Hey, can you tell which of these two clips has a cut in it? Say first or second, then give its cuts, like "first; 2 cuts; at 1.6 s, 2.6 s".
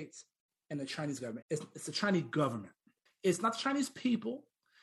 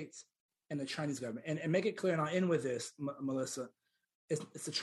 first; 2 cuts; at 1.4 s, 3.1 s